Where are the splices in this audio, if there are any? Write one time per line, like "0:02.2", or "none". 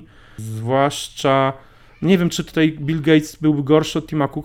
none